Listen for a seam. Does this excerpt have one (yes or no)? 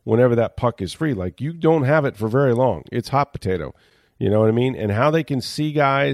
no